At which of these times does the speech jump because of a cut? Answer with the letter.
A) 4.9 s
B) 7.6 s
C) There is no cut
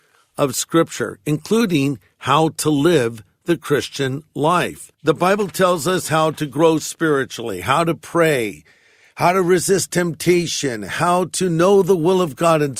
A